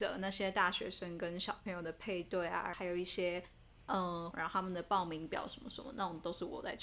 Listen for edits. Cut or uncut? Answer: cut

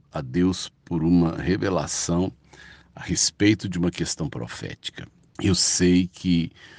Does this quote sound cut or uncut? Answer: cut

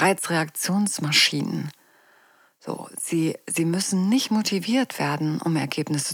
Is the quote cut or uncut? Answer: uncut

